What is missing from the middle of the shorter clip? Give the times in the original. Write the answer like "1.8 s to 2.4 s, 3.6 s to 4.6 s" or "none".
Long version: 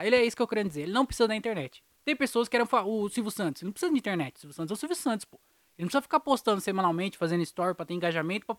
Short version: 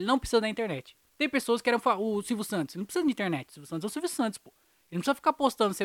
none